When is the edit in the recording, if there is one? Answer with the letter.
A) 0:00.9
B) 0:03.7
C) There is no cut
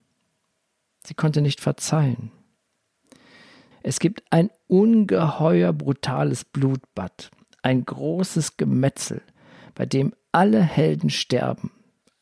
B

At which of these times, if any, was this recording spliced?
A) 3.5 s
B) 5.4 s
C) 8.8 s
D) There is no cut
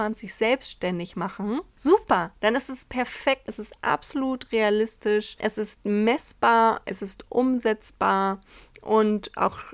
A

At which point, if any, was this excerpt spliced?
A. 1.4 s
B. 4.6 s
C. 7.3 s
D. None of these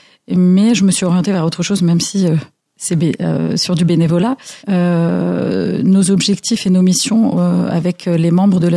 B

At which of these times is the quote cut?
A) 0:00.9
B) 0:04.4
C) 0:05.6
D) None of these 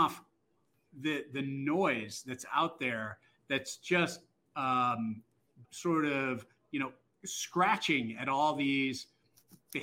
C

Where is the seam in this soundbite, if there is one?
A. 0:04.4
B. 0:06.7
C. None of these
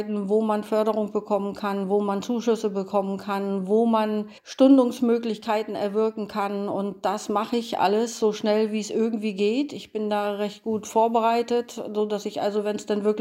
A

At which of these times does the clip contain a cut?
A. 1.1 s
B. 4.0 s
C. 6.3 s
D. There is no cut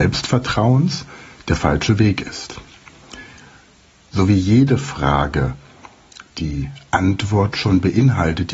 B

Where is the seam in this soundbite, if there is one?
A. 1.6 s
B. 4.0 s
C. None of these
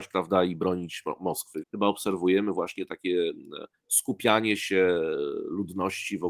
A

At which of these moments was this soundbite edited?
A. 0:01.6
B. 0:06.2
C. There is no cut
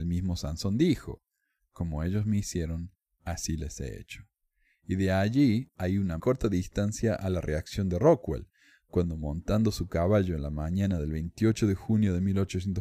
B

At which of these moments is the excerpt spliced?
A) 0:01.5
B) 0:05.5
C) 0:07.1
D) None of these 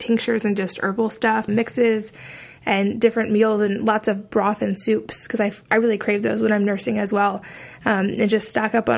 A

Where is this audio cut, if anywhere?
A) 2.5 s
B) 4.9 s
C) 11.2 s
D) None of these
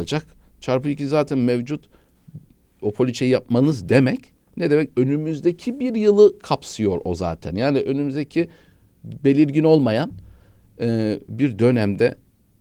D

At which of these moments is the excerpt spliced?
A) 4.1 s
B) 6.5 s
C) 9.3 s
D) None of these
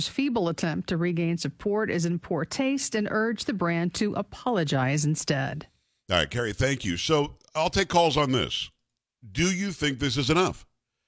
D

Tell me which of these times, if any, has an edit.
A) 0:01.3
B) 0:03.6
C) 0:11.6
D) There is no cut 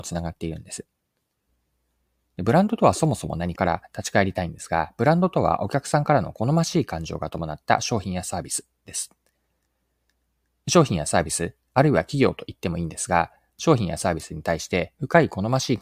B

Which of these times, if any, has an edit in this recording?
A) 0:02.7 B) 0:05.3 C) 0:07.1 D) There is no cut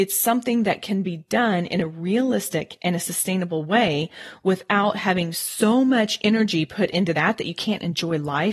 D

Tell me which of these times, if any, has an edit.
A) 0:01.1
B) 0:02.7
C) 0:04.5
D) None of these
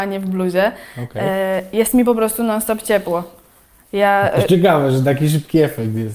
D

